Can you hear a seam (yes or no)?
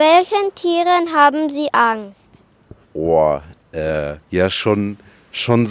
yes